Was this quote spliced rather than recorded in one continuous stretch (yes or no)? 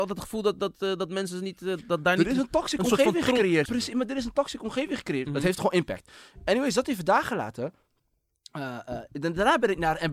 yes